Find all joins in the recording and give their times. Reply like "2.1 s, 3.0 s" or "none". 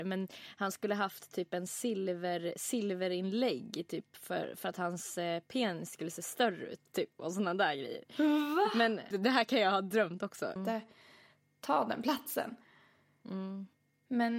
9.1 s, 10.6 s